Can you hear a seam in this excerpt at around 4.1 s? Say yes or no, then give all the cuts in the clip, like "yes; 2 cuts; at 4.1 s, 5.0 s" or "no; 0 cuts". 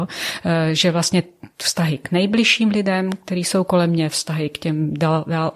no; 0 cuts